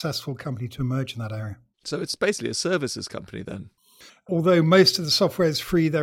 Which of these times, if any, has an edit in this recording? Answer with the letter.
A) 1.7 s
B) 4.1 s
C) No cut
B